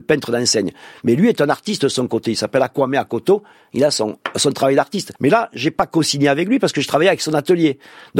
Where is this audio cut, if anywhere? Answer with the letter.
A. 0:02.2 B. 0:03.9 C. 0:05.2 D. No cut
C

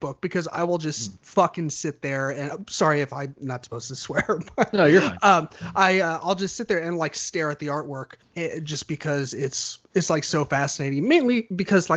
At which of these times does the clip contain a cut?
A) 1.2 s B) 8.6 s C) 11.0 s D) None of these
D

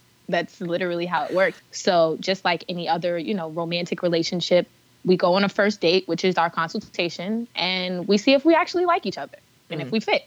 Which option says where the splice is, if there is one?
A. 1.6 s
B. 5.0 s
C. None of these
A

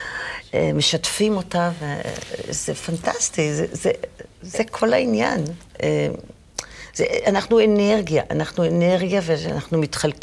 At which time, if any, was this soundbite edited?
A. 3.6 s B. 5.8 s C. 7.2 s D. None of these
B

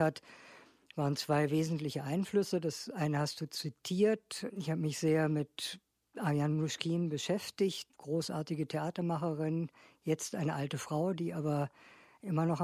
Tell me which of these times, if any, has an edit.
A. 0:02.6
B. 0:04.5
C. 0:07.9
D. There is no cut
C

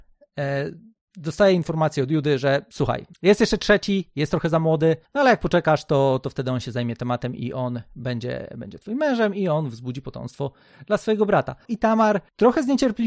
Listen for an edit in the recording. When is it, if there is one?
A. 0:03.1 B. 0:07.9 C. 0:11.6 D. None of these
C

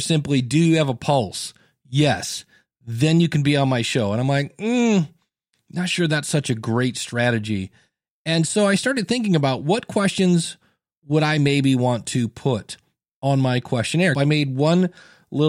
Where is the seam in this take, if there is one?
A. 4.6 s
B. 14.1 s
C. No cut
B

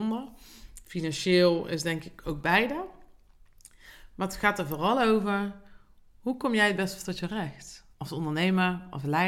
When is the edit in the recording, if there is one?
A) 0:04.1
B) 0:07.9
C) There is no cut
B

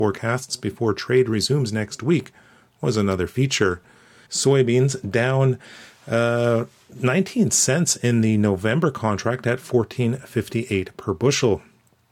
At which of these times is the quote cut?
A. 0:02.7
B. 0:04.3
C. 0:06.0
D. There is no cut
B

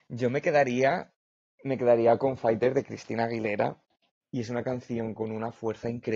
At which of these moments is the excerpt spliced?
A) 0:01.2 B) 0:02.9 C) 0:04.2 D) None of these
C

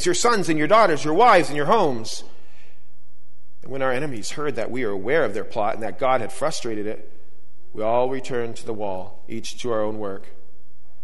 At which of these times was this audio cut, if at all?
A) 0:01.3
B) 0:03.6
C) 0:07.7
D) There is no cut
D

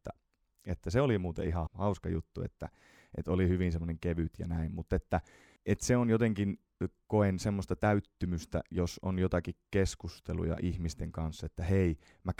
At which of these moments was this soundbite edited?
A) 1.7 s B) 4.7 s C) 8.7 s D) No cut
A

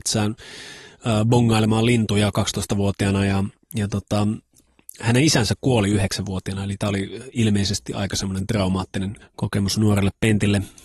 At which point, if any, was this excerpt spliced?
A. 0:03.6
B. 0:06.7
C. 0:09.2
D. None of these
C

